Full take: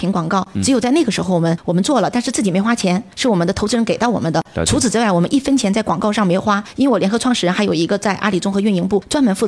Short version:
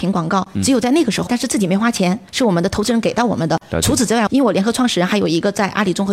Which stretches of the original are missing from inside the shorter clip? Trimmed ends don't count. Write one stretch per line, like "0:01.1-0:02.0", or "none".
0:01.3-0:02.1
0:05.1-0:06.7